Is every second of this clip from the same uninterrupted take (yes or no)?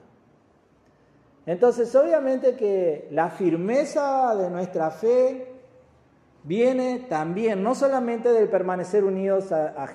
yes